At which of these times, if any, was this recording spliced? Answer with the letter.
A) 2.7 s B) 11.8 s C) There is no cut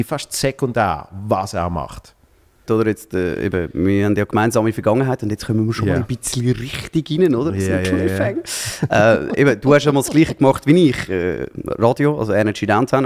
A